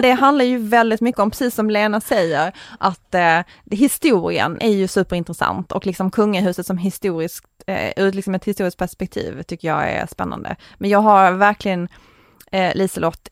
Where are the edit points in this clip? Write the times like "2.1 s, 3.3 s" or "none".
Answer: none

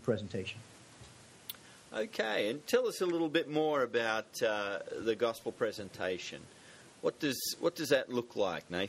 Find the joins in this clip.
none

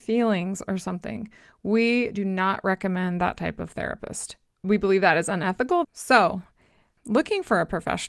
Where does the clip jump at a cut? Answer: 4.5 s, 5.8 s

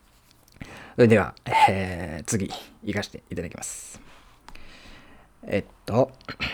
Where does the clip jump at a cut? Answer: none

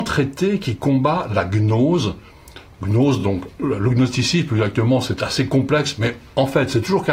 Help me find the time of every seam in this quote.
none

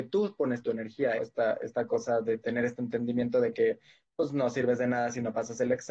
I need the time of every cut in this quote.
1.2 s

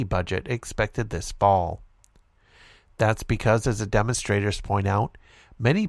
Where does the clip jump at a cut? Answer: none

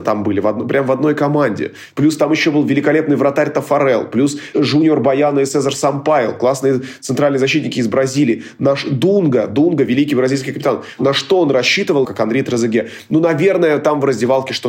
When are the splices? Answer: 12.0 s

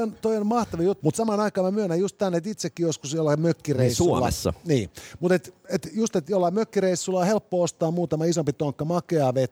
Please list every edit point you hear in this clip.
1.0 s

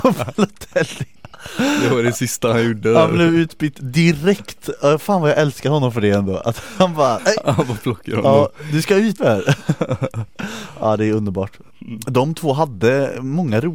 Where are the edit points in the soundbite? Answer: 7.2 s, 9.2 s

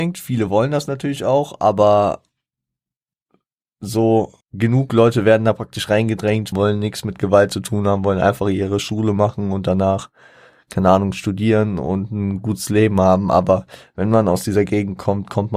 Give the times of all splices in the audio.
4.4 s, 6.5 s

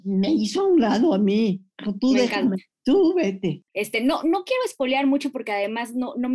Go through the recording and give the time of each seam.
3.7 s

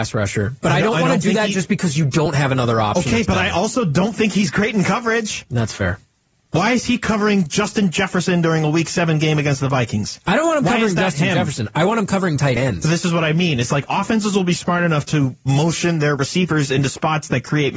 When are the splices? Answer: none

